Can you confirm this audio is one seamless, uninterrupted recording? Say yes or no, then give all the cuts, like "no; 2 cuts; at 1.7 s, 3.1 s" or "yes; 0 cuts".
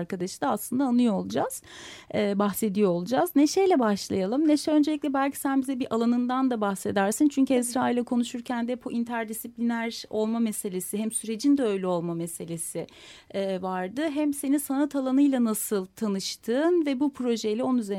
yes; 0 cuts